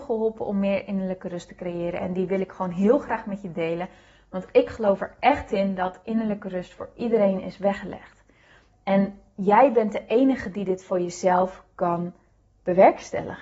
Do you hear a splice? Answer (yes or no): no